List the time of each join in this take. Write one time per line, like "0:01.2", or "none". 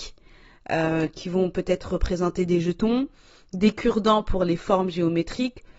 none